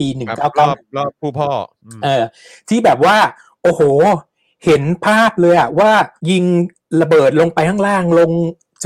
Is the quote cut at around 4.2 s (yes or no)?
no